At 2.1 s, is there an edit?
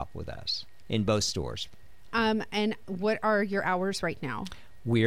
yes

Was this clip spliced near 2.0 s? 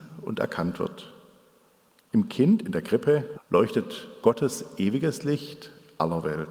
no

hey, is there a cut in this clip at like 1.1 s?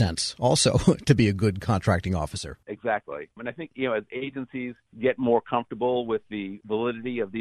no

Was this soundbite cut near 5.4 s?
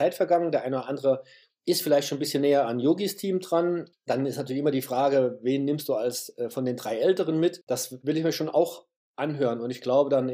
no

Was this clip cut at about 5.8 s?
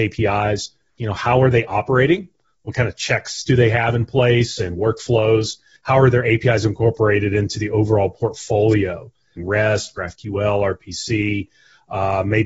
yes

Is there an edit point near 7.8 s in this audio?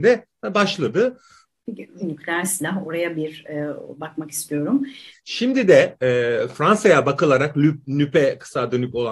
no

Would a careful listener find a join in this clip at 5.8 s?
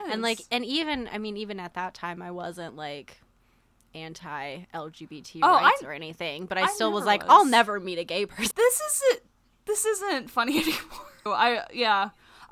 no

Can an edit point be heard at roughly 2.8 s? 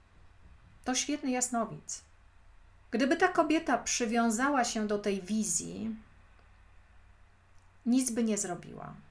yes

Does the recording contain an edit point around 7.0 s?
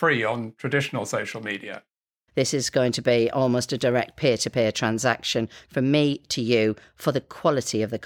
no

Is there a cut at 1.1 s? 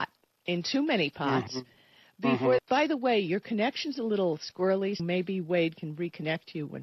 no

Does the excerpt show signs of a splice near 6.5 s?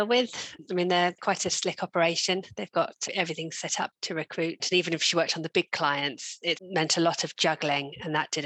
yes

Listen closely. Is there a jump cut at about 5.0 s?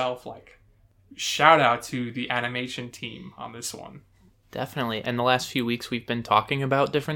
yes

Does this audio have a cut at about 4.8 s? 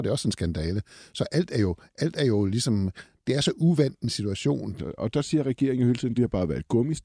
yes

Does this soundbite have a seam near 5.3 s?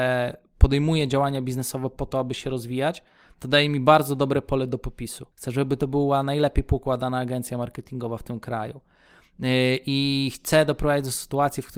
yes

